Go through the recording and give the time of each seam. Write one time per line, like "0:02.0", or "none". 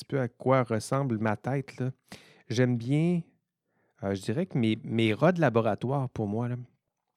none

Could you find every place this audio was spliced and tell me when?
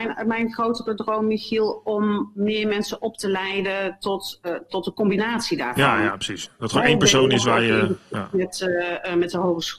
0:04.4

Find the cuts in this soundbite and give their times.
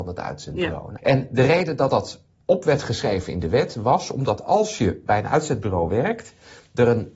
0:01.0

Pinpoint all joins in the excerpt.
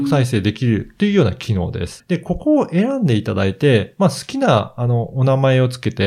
0:02.0

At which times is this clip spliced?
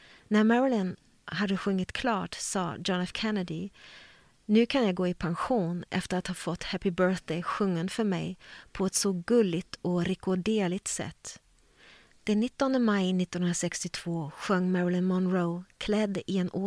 0:12.1

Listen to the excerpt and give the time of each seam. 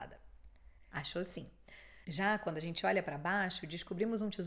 0:00.9
0:02.0

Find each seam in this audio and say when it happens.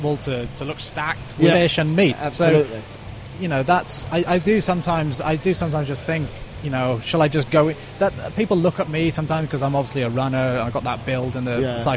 0:01.5

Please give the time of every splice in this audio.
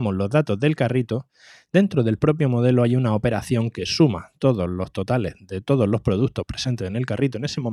none

